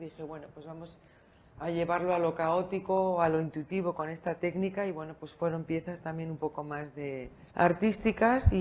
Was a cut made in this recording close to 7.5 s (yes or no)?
yes